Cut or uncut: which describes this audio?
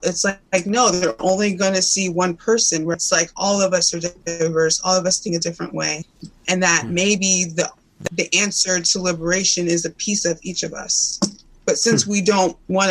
uncut